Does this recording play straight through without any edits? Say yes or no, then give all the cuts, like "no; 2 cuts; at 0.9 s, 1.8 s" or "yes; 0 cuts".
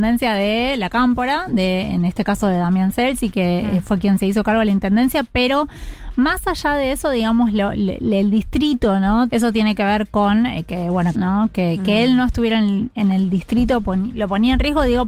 no; 2 cuts; at 9.3 s, 11.1 s